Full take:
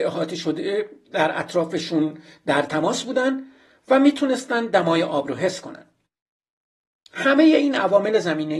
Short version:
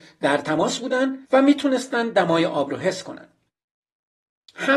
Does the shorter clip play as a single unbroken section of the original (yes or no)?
no